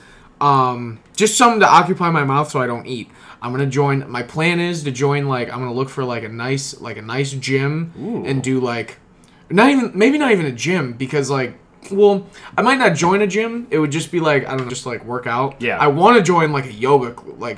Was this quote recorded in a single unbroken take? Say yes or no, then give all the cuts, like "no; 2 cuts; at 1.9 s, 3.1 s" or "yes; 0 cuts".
no; 1 cut; at 14.7 s